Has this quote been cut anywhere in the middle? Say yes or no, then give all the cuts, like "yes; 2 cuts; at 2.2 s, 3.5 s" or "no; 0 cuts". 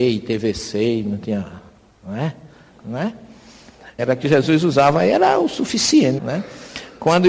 yes; 3 cuts; at 2.7 s, 4.0 s, 6.2 s